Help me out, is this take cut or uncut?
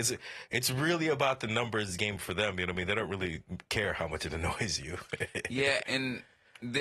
cut